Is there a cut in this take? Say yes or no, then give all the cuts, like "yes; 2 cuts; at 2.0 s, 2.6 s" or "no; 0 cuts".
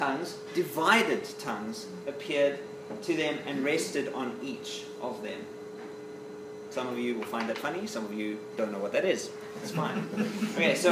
yes; 1 cut; at 6.7 s